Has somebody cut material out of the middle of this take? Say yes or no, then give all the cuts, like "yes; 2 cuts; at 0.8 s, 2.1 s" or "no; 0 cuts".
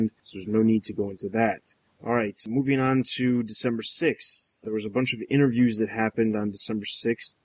no; 0 cuts